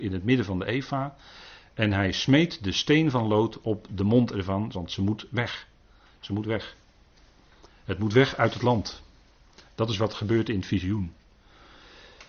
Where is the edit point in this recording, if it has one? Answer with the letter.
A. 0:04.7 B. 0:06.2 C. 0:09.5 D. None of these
A